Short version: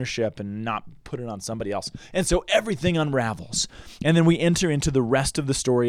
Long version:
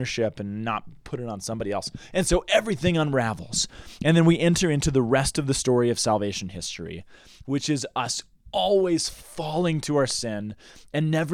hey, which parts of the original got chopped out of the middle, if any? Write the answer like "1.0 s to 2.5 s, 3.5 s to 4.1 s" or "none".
none